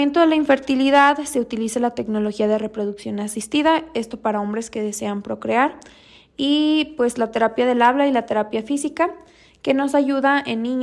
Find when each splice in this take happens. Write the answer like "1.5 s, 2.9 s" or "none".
none